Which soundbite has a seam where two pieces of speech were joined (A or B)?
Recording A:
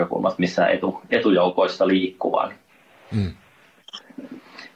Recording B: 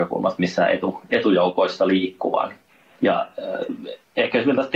B